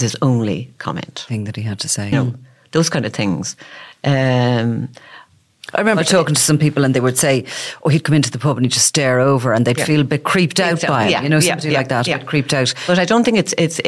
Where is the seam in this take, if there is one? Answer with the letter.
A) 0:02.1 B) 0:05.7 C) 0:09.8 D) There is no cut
A